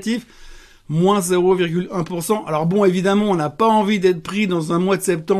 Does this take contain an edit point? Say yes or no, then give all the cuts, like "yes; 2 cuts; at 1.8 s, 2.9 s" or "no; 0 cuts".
no; 0 cuts